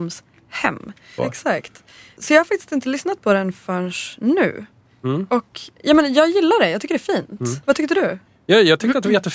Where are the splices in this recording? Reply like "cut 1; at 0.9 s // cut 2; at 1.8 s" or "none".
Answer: cut 1; at 1.2 s